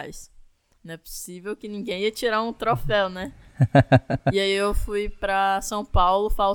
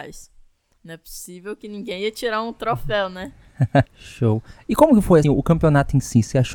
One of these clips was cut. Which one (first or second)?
second